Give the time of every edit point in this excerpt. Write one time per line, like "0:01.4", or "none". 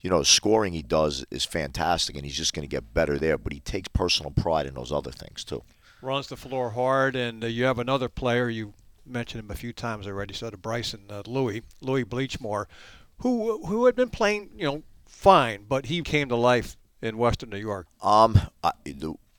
0:16.0
0:17.9